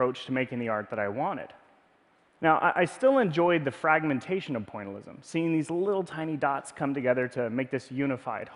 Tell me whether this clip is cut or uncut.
uncut